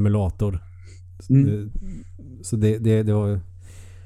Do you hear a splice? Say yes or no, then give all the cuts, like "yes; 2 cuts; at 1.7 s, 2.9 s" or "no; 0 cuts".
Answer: no; 0 cuts